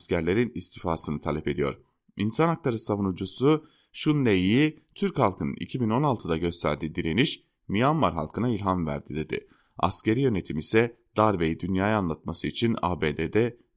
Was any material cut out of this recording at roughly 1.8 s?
no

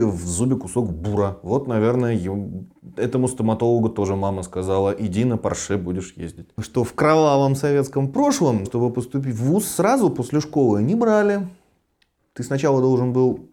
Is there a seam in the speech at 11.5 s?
no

